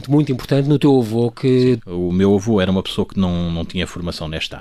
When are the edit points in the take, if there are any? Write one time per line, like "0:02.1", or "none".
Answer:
0:01.8